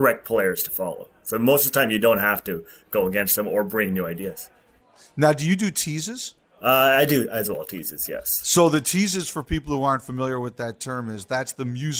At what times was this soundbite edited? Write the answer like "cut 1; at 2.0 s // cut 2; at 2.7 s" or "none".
none